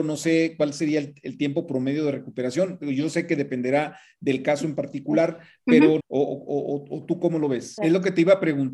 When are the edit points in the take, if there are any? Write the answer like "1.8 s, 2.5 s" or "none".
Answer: 6.0 s, 7.8 s